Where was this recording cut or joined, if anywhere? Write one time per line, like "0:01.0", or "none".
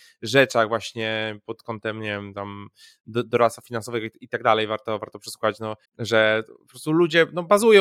0:05.9